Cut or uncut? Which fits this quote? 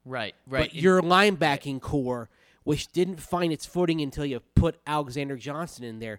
uncut